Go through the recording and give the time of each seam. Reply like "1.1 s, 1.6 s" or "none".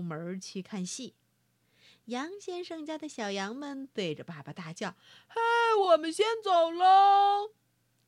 none